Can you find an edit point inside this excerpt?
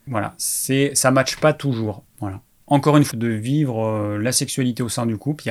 yes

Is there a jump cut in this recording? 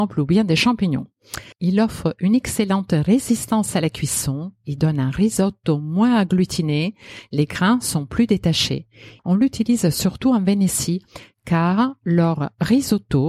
yes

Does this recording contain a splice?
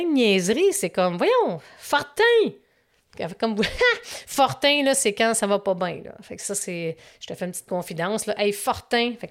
no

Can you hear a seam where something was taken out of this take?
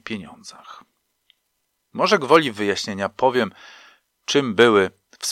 no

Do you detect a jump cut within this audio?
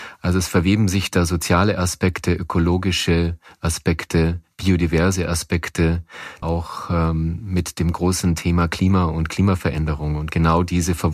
yes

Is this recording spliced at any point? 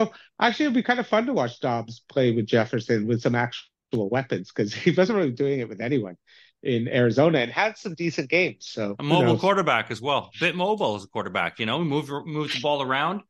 no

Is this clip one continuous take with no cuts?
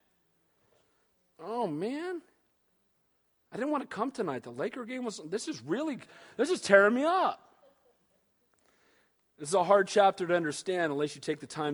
yes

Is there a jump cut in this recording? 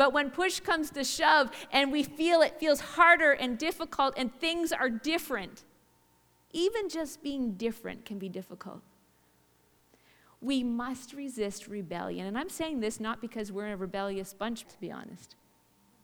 yes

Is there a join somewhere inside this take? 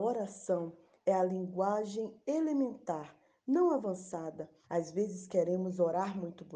yes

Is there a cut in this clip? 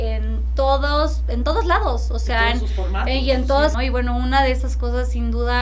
yes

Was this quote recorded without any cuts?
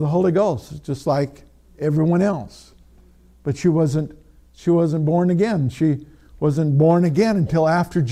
yes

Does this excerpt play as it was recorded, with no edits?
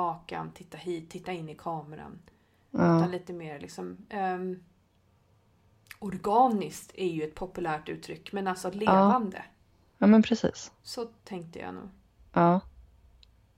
yes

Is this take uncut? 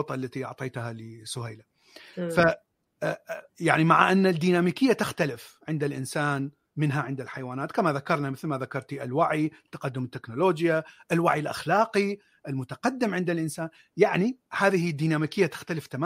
no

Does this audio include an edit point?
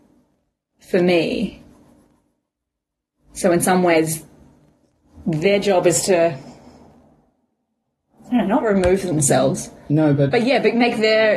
no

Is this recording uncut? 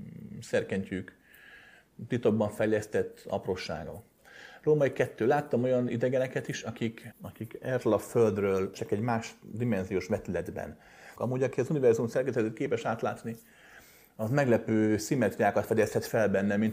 no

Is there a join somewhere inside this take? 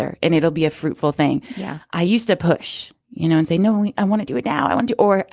no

